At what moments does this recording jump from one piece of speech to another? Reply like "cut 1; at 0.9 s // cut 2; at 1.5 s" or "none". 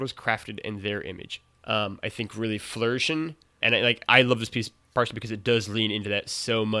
cut 1; at 1.6 s // cut 2; at 3.6 s